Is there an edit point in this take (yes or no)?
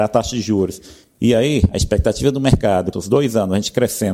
yes